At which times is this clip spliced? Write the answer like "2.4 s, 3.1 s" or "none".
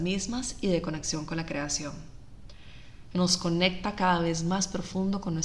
3.1 s